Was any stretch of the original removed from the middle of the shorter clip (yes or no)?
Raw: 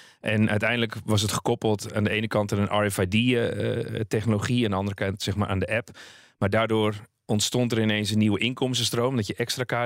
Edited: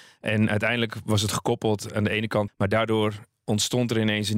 yes